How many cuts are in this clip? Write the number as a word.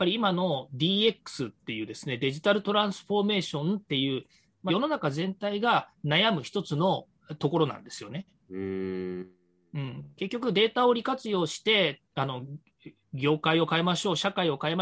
one